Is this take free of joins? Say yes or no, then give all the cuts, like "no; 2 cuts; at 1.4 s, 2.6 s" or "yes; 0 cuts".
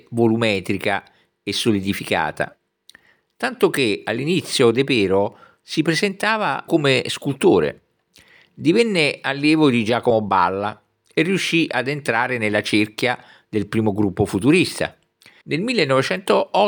no; 2 cuts; at 6.7 s, 15.4 s